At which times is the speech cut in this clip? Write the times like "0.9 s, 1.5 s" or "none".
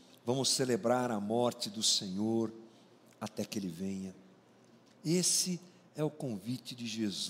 4.9 s